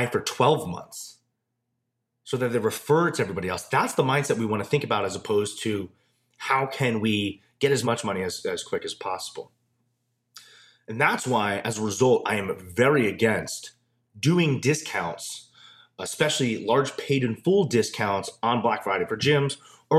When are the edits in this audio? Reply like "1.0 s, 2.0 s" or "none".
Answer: none

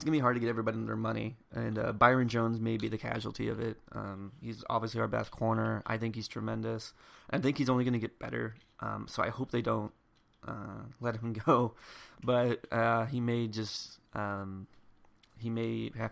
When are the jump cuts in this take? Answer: none

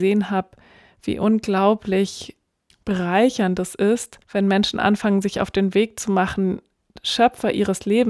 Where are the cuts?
2.7 s, 4.2 s

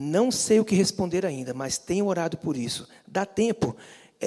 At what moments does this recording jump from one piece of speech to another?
none

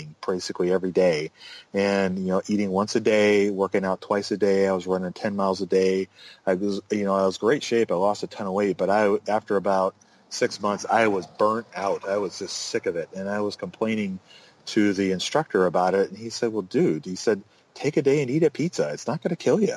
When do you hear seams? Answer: none

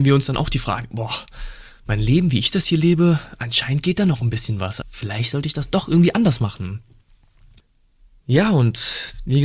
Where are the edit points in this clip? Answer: 4.8 s

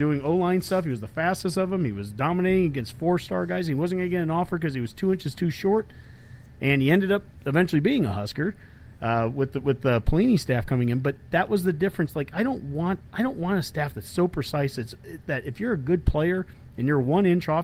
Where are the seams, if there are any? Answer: none

